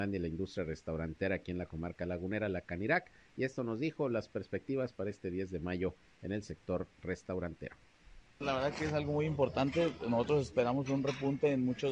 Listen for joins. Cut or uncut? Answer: uncut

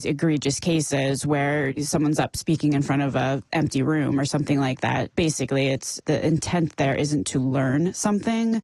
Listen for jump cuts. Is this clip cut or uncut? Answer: cut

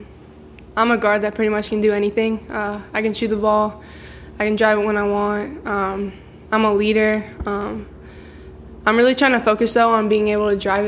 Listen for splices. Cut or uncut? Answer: uncut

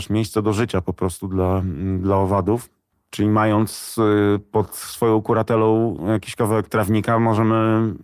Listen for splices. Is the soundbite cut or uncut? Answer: cut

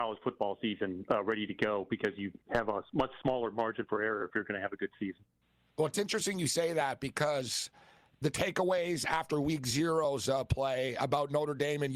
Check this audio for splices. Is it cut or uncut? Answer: uncut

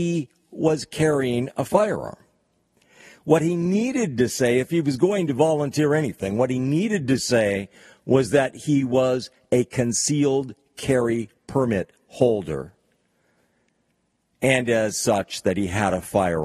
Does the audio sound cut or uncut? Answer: uncut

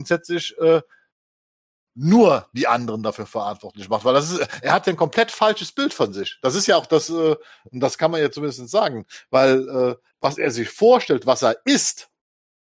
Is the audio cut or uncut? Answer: uncut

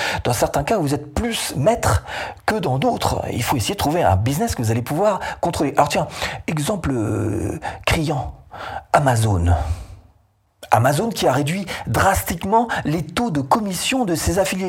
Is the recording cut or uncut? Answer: uncut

